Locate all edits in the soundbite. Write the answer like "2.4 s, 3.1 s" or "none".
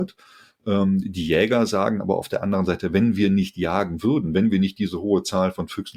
none